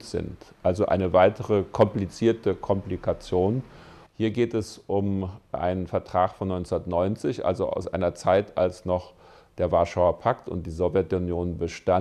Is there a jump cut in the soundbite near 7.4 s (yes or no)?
no